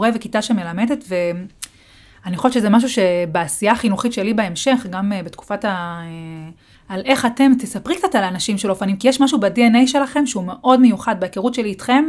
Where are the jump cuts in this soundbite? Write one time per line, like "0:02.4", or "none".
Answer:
0:06.7